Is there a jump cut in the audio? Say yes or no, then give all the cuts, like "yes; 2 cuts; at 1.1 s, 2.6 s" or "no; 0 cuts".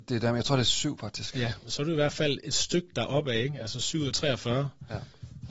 no; 0 cuts